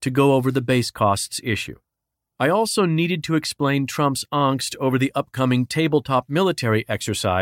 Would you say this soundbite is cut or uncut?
cut